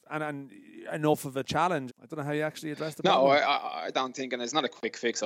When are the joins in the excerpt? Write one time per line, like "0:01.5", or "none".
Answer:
0:01.9